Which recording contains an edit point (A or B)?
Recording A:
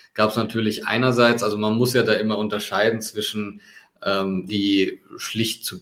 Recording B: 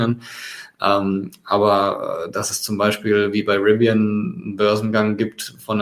A